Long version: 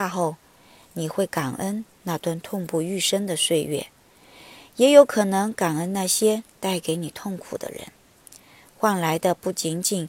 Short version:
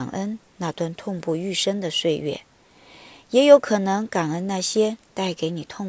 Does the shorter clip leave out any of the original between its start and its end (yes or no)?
no